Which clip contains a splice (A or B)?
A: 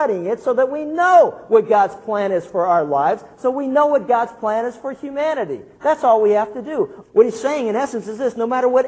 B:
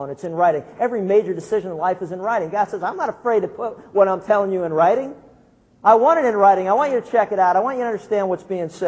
A